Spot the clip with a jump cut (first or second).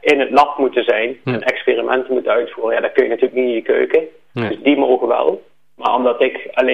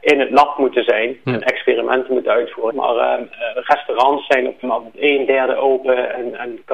second